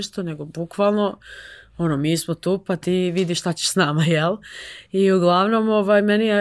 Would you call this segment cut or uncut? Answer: uncut